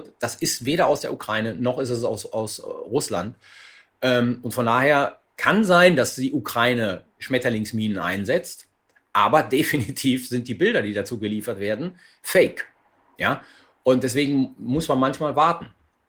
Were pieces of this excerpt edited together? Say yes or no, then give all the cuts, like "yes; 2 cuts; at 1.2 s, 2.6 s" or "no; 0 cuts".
no; 0 cuts